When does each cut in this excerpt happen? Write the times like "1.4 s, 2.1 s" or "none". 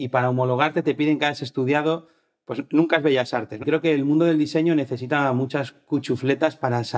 3.6 s